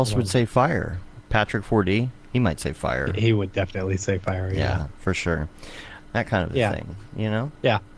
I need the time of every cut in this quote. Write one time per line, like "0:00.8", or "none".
0:06.0